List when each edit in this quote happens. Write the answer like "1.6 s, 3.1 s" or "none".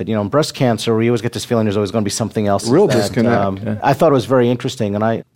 2.6 s